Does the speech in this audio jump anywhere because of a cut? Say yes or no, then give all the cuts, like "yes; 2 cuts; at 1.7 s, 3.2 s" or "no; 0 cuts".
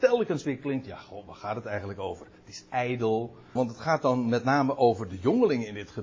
yes; 1 cut; at 3.6 s